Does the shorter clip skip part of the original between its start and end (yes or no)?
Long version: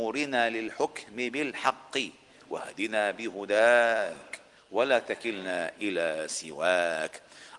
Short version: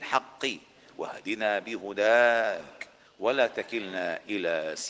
no